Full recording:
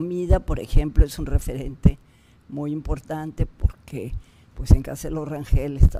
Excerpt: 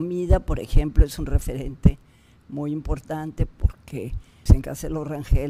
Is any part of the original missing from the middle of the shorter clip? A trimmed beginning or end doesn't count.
yes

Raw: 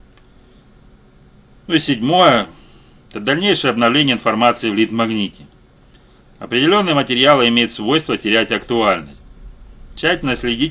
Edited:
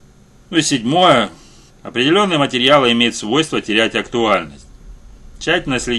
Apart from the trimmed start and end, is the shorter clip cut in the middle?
yes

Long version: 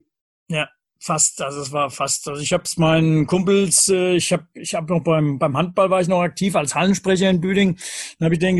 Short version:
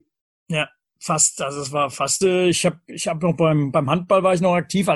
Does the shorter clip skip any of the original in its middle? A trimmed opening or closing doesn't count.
yes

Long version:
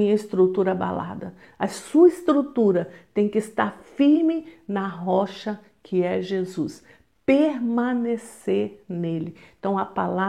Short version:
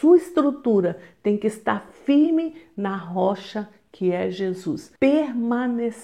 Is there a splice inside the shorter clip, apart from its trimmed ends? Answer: yes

